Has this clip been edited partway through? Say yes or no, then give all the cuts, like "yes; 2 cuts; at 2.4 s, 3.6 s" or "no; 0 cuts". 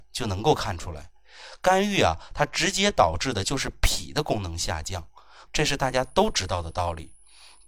yes; 1 cut; at 5.5 s